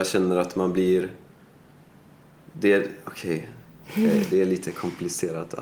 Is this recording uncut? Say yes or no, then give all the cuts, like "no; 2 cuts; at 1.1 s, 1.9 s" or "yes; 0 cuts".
yes; 0 cuts